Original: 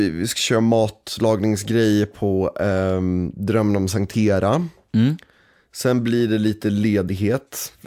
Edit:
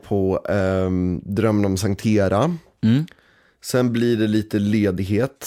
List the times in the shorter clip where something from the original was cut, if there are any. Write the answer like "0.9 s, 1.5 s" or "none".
none